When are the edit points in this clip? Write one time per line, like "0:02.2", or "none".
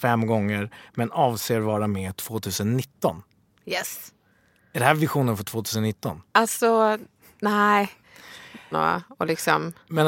0:06.3
0:08.7